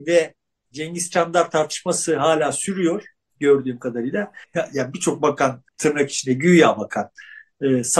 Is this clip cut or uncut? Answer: cut